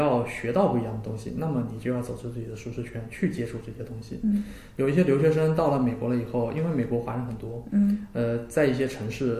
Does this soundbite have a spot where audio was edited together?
no; 0 cuts

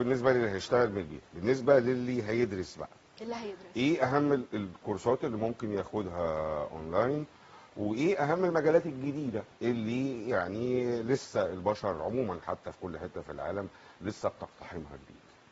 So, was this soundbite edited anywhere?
yes; 1 cut; at 9.5 s

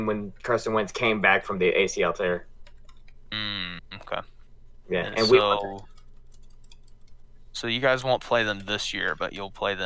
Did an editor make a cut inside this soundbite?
no; 0 cuts

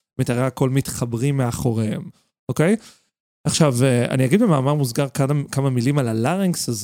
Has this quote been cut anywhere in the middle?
no; 0 cuts

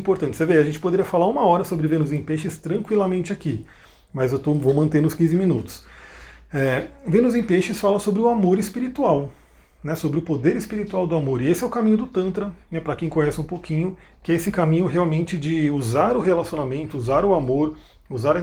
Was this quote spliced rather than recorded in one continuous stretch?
no; 0 cuts

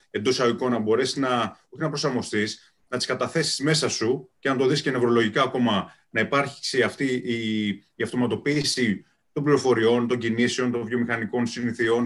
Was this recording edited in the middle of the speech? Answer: no; 0 cuts

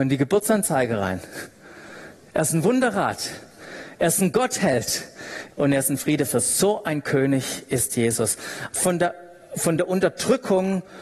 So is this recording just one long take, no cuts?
no; 2 cuts; at 5.5 s, 8.7 s

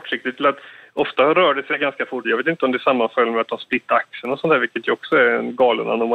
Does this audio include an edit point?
yes; 1 cut; at 2.2 s

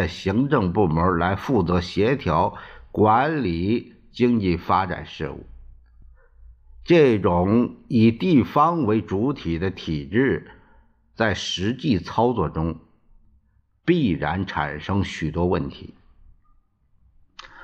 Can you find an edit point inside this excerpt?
no; 0 cuts

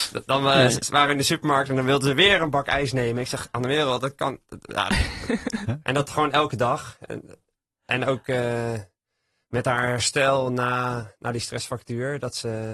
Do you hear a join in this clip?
no; 0 cuts

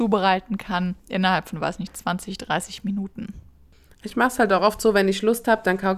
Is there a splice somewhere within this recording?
yes; 1 cut; at 1.0 s

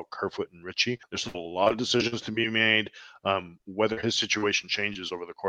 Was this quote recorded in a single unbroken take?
no; 1 cut; at 1.0 s

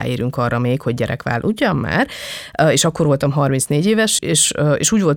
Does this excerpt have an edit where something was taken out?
yes; 1 cut; at 4.2 s

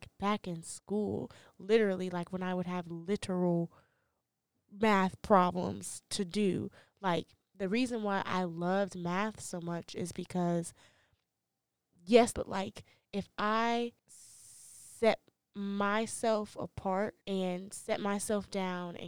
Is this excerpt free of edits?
no; 3 cuts; at 12.3 s, 14.0 s, 17.2 s

